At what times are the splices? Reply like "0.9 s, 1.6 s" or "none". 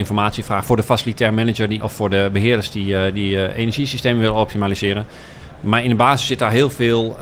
1.8 s